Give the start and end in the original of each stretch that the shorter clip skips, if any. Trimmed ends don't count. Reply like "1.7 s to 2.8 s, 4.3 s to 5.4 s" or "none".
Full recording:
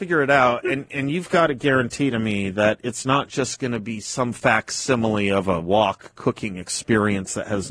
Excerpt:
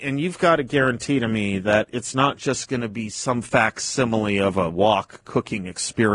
none